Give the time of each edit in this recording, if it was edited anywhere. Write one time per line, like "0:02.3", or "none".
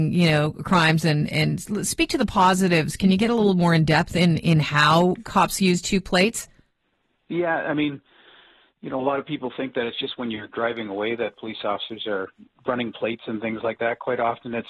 none